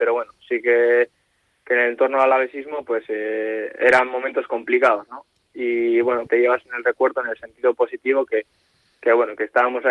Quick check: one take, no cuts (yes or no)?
no